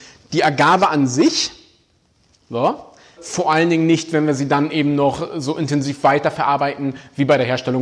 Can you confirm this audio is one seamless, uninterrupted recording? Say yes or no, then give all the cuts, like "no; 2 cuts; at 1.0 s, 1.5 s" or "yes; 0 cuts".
no; 1 cut; at 3.2 s